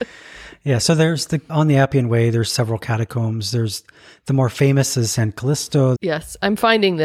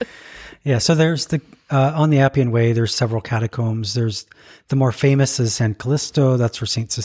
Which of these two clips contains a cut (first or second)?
first